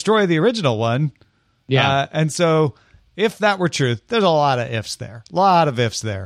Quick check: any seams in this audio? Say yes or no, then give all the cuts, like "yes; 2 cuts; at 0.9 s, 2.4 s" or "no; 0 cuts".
no; 0 cuts